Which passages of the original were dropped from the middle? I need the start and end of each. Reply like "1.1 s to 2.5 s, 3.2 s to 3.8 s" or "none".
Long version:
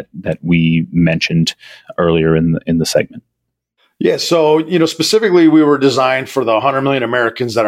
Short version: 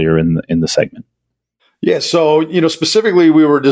none